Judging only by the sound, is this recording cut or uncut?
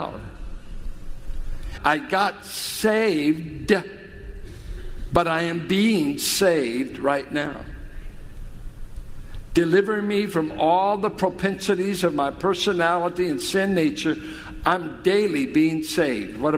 cut